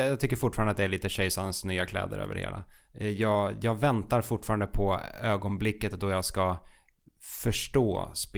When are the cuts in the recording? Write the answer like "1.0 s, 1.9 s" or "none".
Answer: none